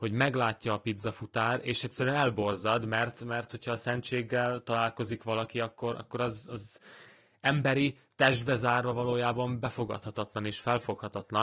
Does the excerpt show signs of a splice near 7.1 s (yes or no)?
no